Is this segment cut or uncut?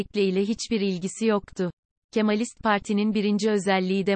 cut